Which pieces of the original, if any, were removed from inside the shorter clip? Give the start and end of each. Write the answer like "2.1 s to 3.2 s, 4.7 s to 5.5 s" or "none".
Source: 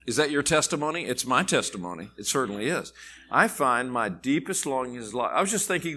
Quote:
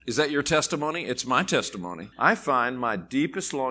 2.1 s to 3.2 s